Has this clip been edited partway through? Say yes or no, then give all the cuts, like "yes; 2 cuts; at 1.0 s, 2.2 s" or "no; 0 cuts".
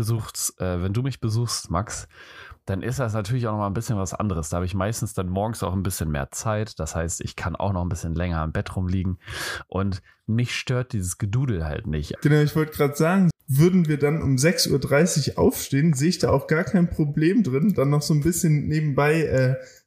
yes; 2 cuts; at 12.2 s, 13.3 s